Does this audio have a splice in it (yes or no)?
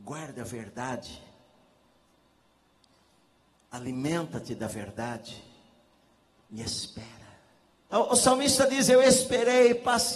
yes